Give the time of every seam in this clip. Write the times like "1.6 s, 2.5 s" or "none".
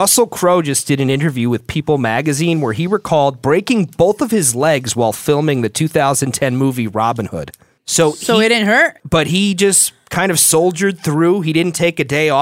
7.8 s, 9.0 s